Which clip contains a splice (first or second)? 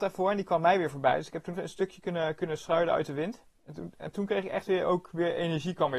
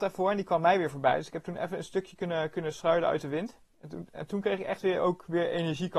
first